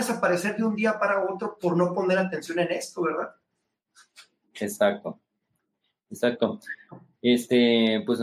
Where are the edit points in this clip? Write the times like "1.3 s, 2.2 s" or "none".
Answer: none